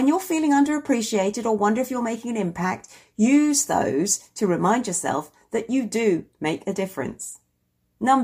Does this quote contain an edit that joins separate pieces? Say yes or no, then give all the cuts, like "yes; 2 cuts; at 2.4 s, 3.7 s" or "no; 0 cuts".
no; 0 cuts